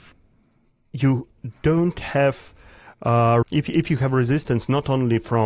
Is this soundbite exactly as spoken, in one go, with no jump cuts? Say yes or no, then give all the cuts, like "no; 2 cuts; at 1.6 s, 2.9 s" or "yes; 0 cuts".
no; 1 cut; at 3.4 s